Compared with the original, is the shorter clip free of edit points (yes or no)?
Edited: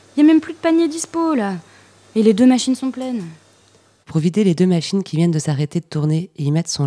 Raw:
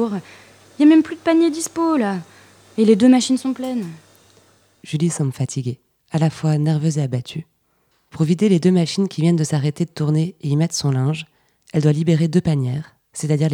no